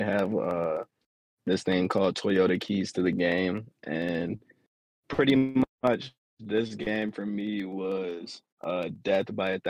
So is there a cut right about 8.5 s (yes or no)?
yes